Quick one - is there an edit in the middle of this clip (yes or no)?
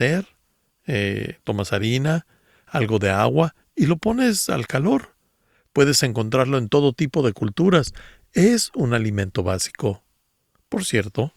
no